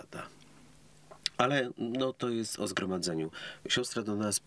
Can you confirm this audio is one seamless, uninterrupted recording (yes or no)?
yes